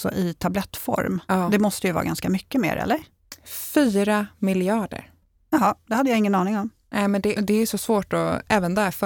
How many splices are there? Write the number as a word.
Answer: one